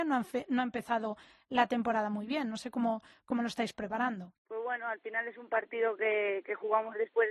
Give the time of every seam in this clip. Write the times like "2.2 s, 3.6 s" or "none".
4.4 s